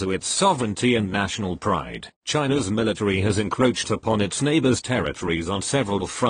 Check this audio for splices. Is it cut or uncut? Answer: cut